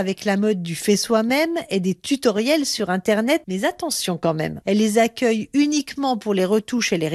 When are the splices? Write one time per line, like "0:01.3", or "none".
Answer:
0:03.4
0:04.6